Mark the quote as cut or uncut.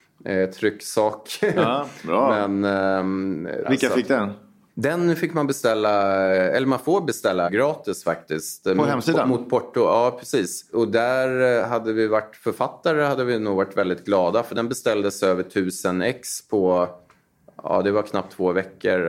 uncut